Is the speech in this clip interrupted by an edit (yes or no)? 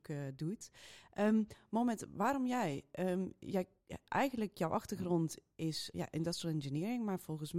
yes